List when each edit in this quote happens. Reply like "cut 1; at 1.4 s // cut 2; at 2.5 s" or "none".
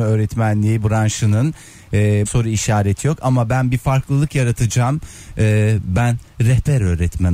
cut 1; at 2.3 s

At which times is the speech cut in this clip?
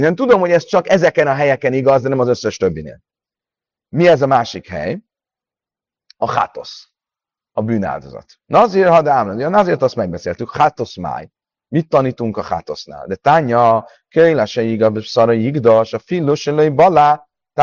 cut 1; at 8.4 s

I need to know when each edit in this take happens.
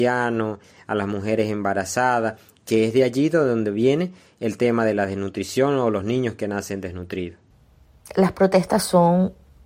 none

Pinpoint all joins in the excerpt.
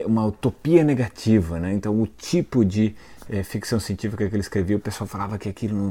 none

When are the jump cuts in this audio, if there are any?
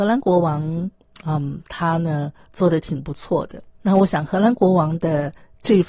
cut 1; at 3.7 s

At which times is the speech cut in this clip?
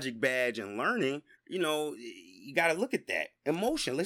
cut 1; at 1.3 s

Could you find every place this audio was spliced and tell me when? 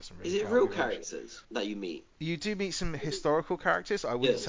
cut 1; at 1.4 s

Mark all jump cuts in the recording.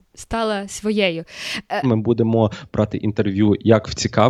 cut 1; at 1.8 s

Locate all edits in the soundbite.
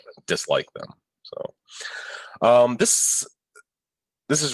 none

